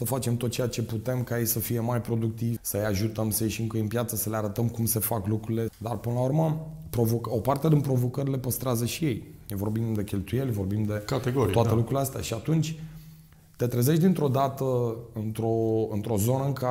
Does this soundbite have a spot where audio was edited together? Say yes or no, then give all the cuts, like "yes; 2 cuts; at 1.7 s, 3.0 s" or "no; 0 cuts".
yes; 2 cuts; at 2.6 s, 5.7 s